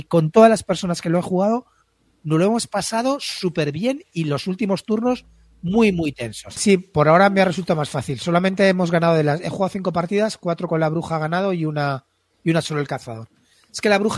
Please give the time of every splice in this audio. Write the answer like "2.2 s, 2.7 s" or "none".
6.6 s